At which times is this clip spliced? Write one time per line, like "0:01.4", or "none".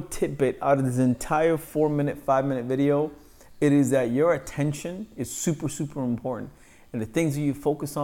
none